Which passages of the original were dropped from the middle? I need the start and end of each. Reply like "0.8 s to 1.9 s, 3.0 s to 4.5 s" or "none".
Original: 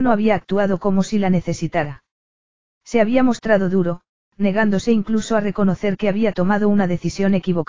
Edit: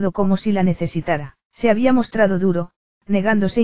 2.1 s to 2.7 s